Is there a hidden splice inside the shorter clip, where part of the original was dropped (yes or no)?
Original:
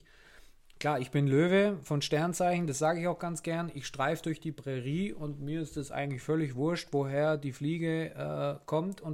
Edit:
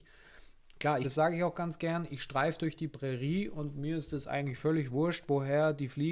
yes